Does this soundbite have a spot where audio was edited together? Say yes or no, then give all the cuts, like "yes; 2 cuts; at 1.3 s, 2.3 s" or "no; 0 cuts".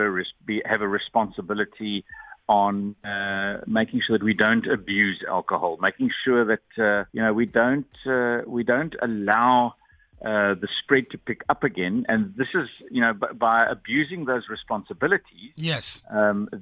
yes; 1 cut; at 7.1 s